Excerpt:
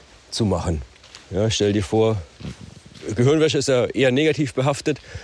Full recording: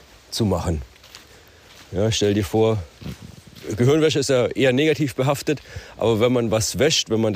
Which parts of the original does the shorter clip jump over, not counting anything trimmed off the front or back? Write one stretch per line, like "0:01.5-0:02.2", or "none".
0:01.2-0:01.8